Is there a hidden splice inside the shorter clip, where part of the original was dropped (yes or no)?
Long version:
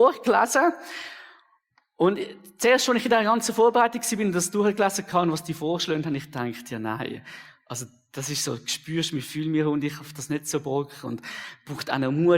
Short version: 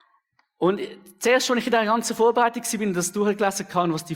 no